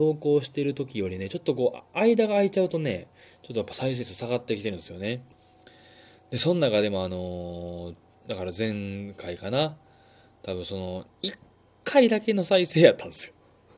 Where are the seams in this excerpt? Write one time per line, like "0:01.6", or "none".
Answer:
0:11.1

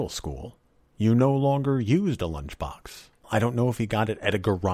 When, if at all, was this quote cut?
0:03.2

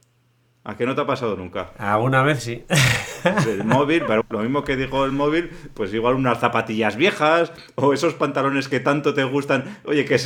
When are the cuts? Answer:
0:04.2

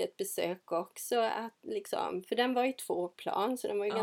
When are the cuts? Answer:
none

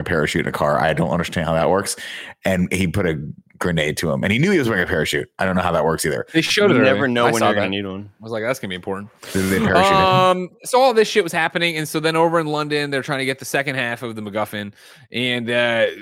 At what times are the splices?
none

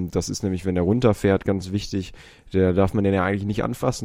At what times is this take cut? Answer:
none

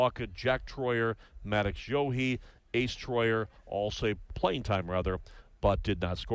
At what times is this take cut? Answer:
0:04.3

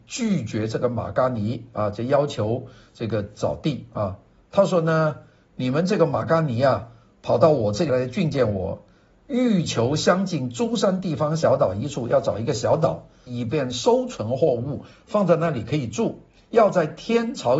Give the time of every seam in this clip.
0:07.9
0:13.3

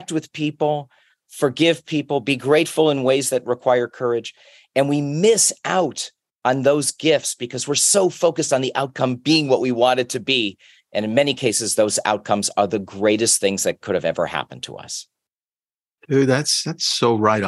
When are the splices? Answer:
none

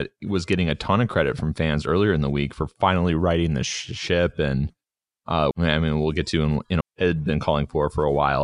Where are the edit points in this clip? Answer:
0:05.5
0:06.8

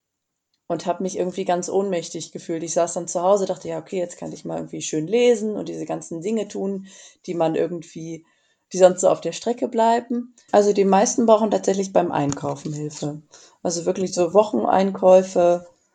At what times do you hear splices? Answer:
0:10.5

